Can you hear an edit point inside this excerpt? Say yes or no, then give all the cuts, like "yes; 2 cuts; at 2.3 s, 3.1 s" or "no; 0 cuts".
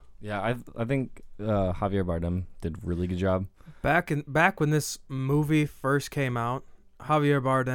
no; 0 cuts